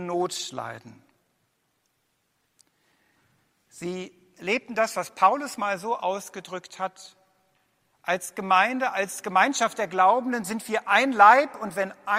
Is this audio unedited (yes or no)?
yes